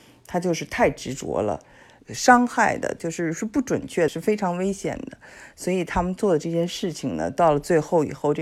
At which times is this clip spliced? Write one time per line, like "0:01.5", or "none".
0:02.0
0:04.1